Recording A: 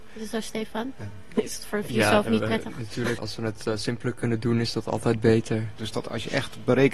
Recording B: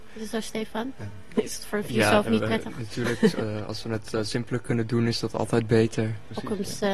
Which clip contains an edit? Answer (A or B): A